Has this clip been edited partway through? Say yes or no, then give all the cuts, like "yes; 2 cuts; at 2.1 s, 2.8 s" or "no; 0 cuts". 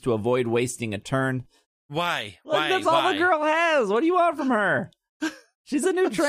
yes; 1 cut; at 1.8 s